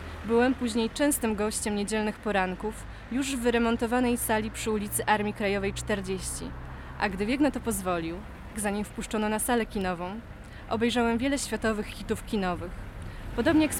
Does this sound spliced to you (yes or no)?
yes